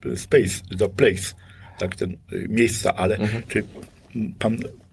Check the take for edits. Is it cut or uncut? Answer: uncut